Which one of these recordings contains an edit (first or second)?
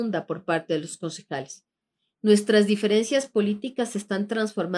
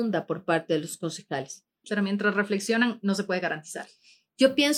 second